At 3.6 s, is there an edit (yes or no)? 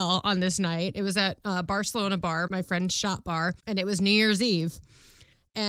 yes